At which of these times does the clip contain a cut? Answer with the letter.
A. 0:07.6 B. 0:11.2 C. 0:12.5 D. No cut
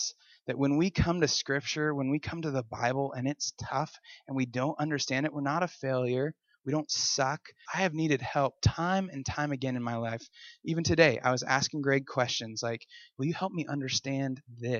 A